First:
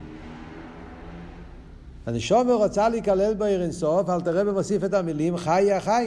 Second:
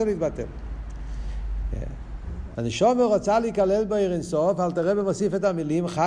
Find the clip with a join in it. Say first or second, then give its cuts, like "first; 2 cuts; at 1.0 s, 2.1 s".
second; 1 cut; at 2.5 s